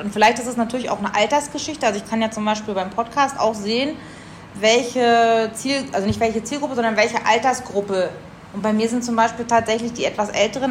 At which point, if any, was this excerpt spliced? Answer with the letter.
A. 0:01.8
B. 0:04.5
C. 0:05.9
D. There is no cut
B